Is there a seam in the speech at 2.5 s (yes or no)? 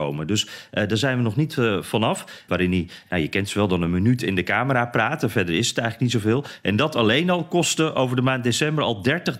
yes